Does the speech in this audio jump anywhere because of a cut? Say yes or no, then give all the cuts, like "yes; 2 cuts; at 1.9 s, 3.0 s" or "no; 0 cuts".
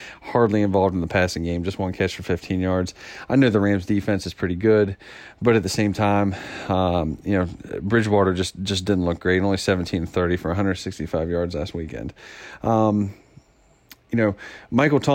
no; 0 cuts